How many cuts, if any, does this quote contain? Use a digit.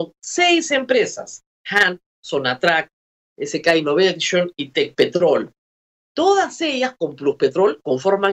1